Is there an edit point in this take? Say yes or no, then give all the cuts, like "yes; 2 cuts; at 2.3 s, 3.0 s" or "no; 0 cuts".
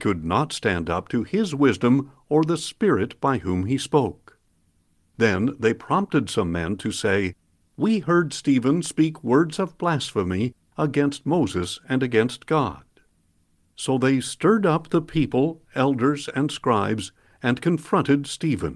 no; 0 cuts